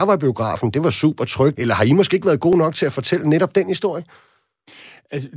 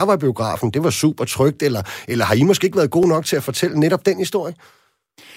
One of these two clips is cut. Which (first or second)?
first